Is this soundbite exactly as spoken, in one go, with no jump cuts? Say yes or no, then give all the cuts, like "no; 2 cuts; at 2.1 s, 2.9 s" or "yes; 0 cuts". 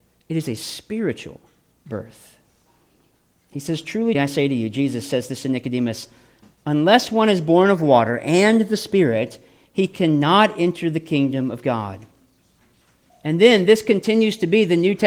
no; 2 cuts; at 4.1 s, 13.1 s